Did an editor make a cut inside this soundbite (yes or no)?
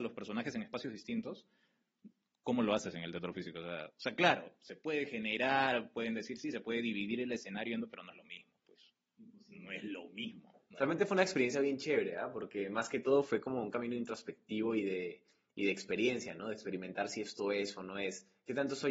no